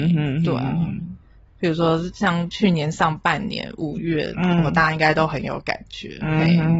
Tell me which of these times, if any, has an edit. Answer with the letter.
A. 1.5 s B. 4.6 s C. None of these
A